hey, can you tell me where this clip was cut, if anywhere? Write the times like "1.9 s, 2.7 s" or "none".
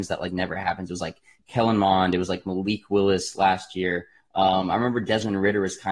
none